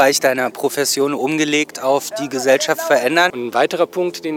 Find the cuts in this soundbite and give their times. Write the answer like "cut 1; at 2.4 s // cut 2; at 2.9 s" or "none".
cut 1; at 3.3 s